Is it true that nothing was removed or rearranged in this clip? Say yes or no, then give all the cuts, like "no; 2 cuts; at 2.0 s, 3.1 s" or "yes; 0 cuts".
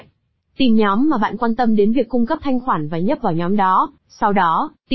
no; 1 cut; at 4.0 s